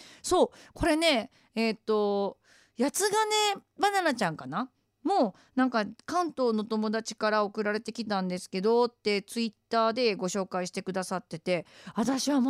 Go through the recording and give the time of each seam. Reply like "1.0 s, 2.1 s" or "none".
none